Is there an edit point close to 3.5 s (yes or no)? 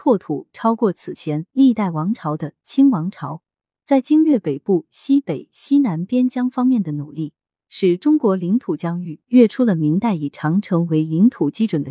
no